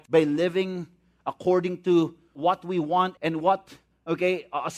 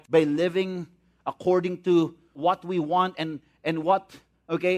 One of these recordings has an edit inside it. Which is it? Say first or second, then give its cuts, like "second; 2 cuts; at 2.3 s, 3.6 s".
first; 1 cut; at 3.2 s